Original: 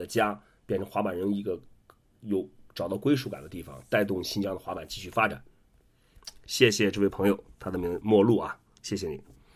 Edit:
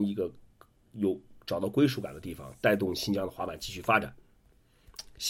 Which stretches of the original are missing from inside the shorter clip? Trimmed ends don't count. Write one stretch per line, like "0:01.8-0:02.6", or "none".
none